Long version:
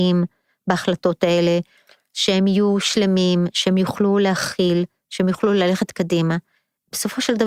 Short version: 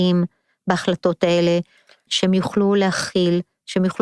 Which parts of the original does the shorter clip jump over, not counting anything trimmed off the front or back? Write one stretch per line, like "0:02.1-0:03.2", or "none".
0:02.1-0:03.5